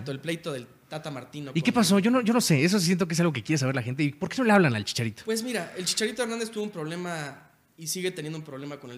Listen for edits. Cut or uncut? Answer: uncut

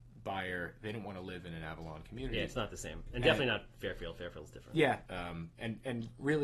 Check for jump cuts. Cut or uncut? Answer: cut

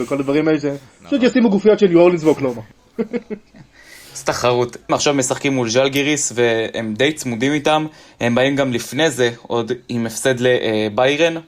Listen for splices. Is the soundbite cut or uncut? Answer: cut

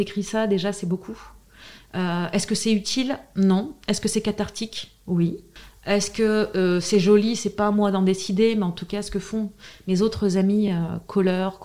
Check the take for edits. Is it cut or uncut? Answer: uncut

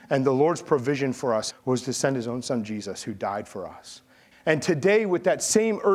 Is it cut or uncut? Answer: cut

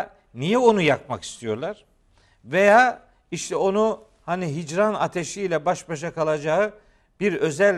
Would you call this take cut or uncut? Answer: uncut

